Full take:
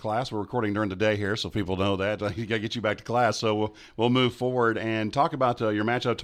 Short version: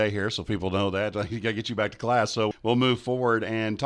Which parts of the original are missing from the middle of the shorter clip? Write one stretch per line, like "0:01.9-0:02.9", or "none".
0:03.6-0:03.8